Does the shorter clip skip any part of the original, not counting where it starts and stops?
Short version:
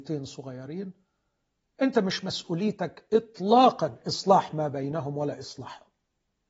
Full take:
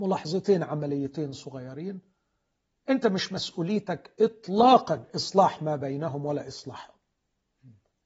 no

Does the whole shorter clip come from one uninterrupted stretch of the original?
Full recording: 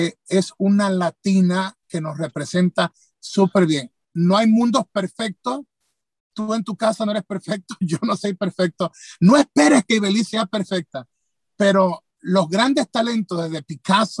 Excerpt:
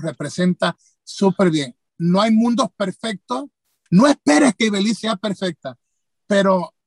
no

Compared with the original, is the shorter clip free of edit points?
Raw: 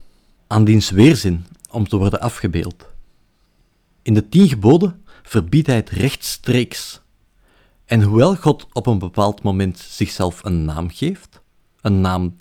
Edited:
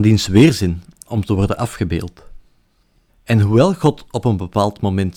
no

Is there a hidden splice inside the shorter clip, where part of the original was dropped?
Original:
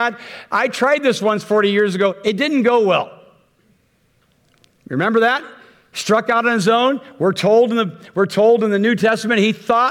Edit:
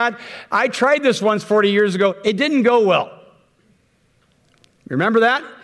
no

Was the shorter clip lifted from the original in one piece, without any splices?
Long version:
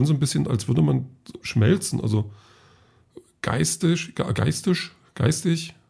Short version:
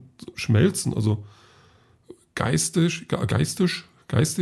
yes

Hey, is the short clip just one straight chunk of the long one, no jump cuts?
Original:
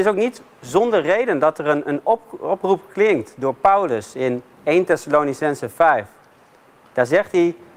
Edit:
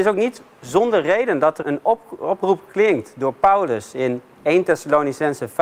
no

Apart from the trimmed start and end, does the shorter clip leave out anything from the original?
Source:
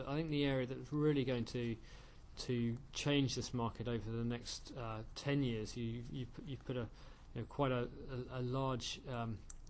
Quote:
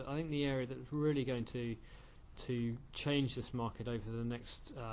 no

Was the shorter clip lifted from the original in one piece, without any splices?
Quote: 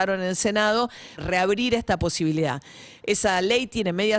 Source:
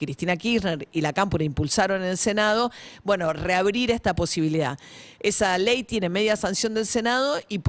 no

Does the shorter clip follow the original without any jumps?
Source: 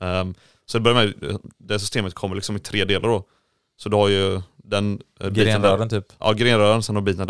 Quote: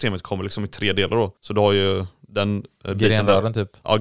no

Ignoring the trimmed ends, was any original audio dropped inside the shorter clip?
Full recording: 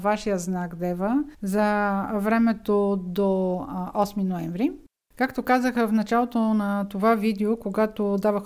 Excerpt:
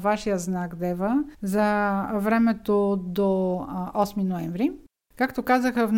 no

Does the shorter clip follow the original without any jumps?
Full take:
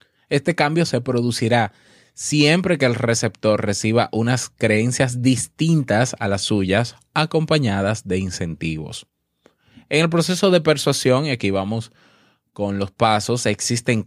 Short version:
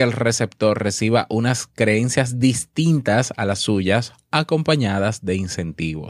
yes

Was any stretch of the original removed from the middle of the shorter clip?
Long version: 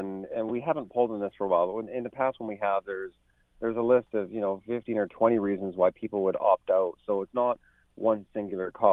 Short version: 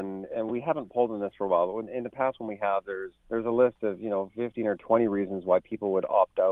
yes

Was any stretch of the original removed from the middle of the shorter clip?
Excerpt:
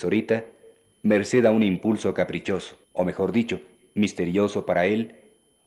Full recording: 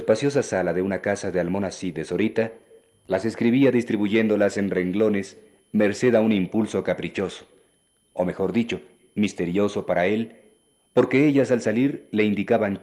yes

